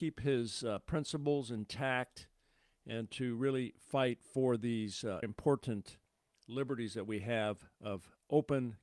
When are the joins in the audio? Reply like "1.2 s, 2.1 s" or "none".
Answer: 5.2 s